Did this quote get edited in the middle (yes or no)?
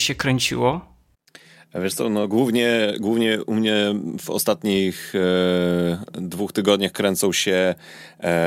no